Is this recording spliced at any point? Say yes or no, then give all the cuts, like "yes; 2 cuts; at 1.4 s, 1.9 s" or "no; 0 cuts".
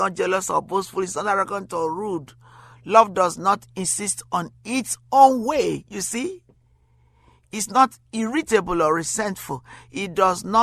no; 0 cuts